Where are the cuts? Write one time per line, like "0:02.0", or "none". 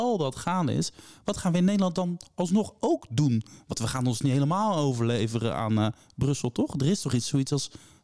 none